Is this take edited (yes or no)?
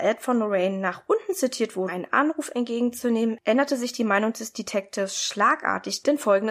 yes